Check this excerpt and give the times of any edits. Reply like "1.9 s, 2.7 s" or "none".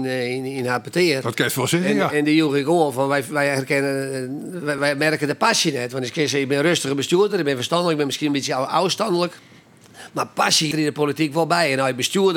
4.8 s, 10.7 s